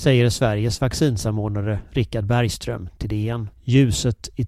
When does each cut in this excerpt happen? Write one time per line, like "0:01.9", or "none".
0:03.5

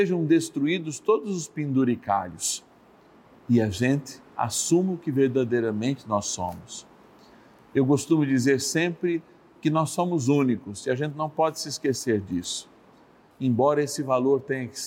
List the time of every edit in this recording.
0:13.3

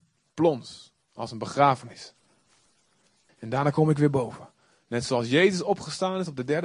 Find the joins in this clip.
0:03.3

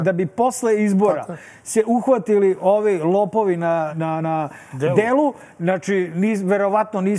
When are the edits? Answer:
0:03.9

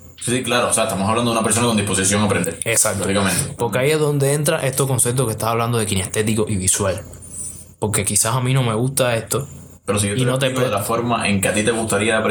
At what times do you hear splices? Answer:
0:03.6

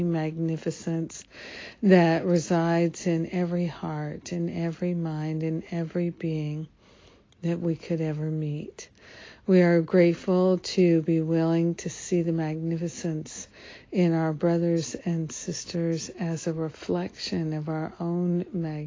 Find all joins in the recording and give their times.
none

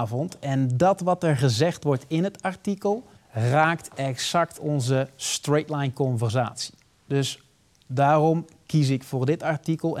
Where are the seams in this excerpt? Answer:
0:03.2

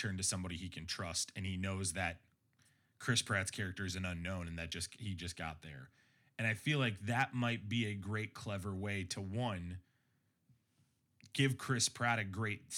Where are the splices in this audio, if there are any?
none

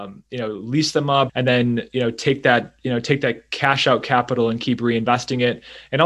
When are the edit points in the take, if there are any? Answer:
0:01.3

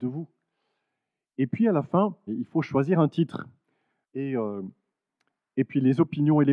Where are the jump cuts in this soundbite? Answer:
0:02.3
0:04.0

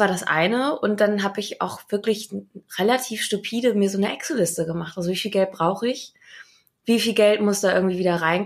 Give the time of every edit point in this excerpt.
none

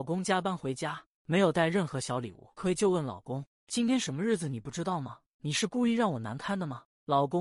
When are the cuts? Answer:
0:02.6
0:05.3

